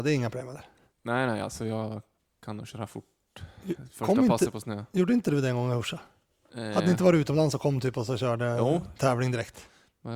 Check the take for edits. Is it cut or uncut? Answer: uncut